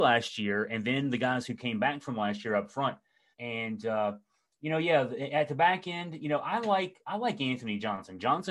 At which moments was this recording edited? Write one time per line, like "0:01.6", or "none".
0:03.3